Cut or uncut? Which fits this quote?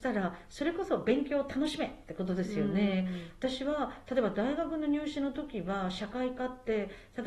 uncut